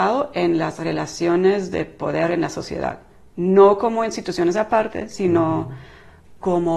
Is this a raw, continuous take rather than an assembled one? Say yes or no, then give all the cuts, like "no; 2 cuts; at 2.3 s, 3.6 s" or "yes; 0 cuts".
yes; 0 cuts